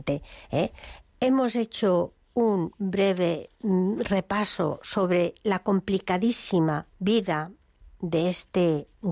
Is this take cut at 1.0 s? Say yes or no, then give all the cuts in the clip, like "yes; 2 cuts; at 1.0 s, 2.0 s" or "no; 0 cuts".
yes; 2 cuts; at 1.0 s, 6.9 s